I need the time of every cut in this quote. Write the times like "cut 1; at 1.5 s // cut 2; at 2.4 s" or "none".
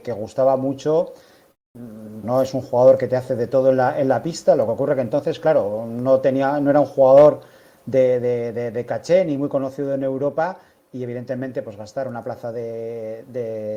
cut 1; at 2.2 s